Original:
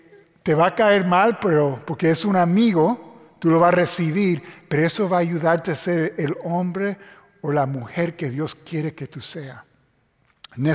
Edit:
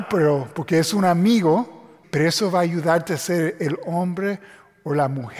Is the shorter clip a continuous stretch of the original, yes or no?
no